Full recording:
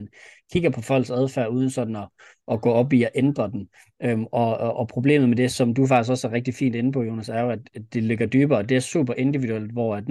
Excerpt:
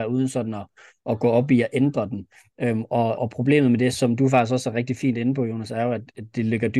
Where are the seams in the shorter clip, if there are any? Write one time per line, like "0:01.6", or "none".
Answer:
0:03.2